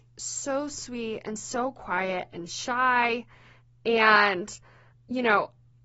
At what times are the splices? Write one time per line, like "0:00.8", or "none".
none